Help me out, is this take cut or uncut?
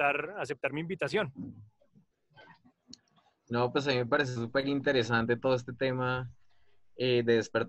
uncut